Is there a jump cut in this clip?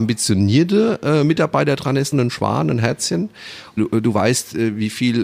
yes; 2 cuts; at 2.1 s, 3.8 s

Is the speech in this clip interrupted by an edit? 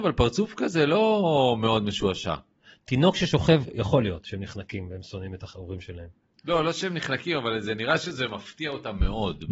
no; 0 cuts

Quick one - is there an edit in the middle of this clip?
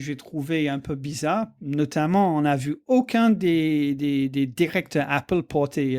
no; 0 cuts

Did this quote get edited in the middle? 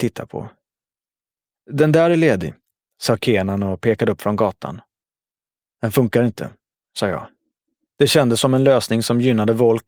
yes; 1 cut; at 7.9 s

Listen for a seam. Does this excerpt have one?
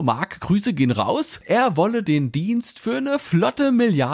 no; 0 cuts

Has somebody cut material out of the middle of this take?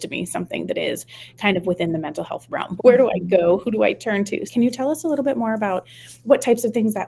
yes; 2 cuts; at 2.8 s, 4.5 s

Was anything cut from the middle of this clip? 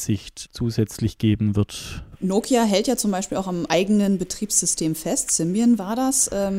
yes; 1 cut; at 3.7 s

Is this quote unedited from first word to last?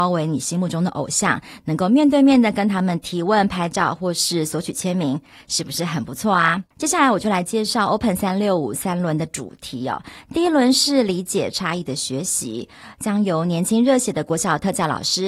no; 1 cut; at 6.7 s

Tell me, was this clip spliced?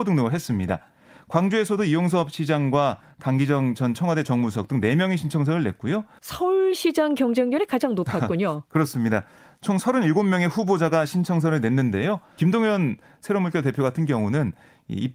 yes; 2 cuts; at 6.2 s, 12.4 s

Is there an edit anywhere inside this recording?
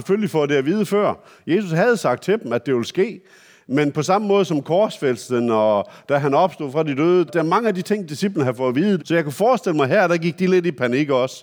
yes; 2 cuts; at 7.3 s, 9.0 s

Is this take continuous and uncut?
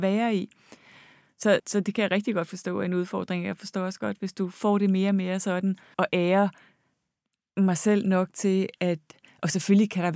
no; 2 cuts; at 1.6 s, 5.9 s

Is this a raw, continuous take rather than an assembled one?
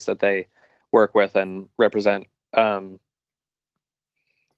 yes; 0 cuts

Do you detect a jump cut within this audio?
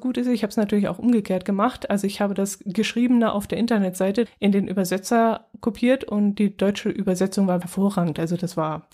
yes; 2 cuts; at 4.3 s, 7.6 s

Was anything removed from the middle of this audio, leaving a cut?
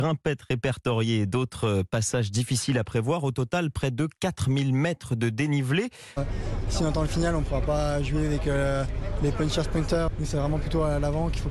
yes; 1 cut; at 6.2 s

